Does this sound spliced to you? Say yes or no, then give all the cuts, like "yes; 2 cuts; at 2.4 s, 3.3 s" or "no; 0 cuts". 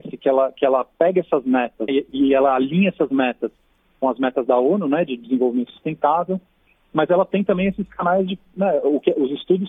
yes; 1 cut; at 1.9 s